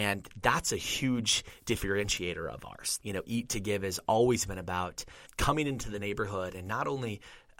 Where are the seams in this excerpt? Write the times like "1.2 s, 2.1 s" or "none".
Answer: 3.0 s, 5.3 s